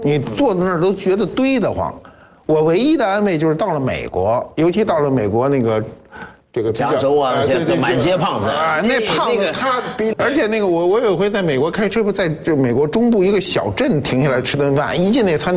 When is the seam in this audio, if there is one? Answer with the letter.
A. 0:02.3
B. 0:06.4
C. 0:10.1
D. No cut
C